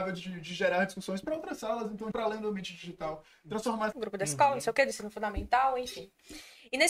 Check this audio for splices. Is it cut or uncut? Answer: cut